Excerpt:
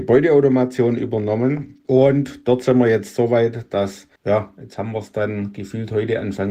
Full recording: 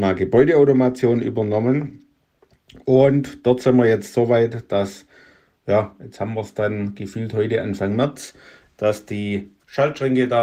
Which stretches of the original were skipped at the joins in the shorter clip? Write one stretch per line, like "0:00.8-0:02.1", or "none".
0:02.1-0:02.8
0:05.1-0:05.6